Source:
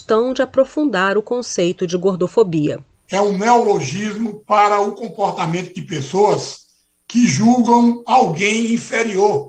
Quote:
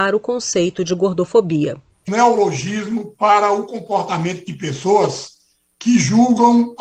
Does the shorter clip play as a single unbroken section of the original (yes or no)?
no